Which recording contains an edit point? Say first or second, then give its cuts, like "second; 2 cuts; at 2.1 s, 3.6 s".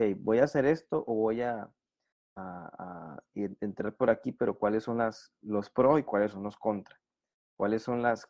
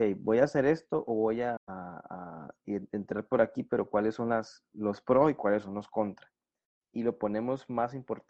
second; 2 cuts; at 1.6 s, 6.8 s